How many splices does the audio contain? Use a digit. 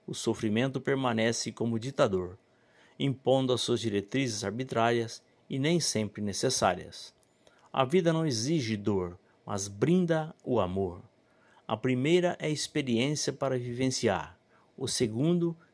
0